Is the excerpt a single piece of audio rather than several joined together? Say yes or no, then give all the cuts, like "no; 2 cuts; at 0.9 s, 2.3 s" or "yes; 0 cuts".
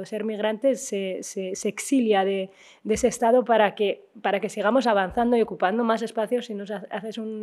yes; 0 cuts